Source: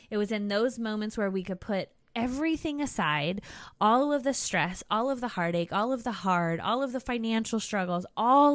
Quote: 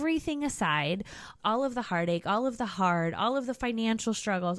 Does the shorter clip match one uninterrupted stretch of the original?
no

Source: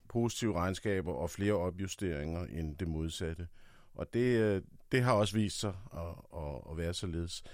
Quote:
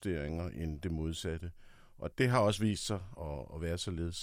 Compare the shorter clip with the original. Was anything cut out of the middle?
yes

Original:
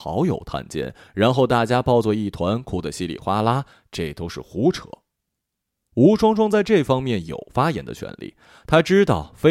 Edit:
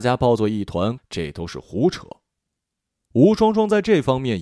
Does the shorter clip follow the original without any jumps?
no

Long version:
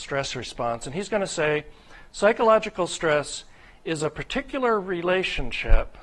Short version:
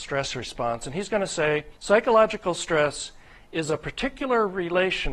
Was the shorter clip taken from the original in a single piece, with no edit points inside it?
no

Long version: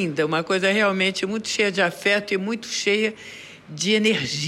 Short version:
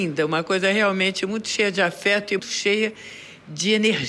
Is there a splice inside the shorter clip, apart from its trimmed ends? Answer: yes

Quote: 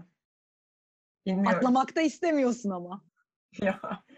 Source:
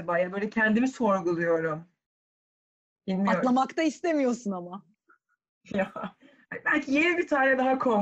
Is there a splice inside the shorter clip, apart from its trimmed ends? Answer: yes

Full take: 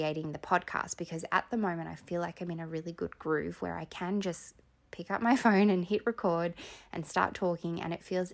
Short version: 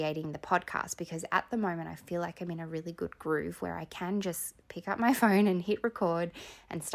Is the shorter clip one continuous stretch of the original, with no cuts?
no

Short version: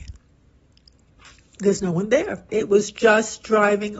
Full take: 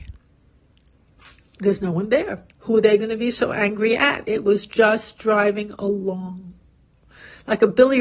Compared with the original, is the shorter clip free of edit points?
no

